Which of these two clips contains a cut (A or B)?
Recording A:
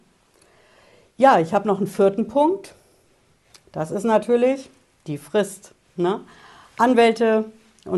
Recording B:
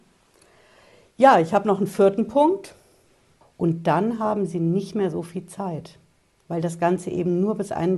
B